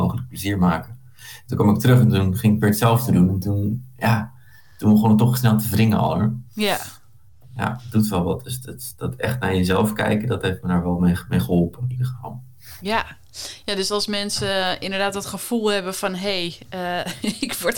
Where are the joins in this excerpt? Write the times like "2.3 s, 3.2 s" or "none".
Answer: none

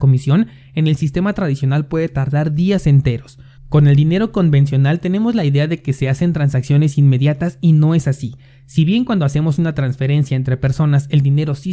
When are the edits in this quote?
3.6 s

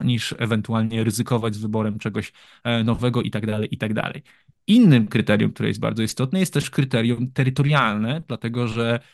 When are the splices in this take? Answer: none

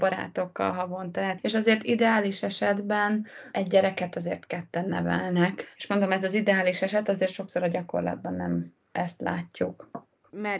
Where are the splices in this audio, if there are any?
5.7 s

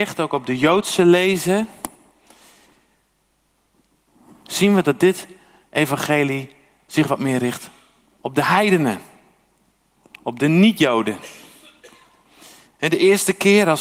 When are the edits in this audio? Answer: 12.6 s

